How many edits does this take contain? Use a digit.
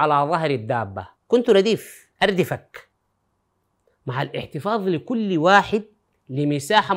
1